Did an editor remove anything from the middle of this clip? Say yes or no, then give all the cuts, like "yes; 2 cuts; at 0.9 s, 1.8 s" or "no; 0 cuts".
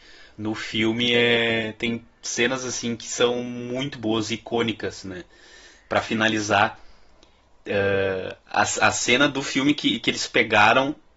no; 0 cuts